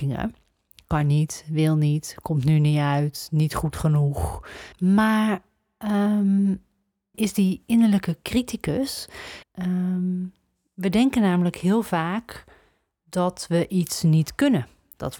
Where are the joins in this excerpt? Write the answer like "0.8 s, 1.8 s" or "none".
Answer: 4.7 s, 7.1 s, 9.4 s